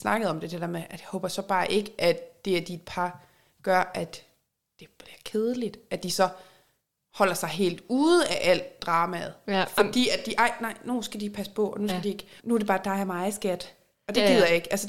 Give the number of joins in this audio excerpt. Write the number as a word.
one